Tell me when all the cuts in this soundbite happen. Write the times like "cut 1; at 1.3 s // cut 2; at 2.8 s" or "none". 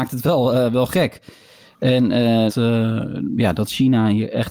cut 1; at 2.5 s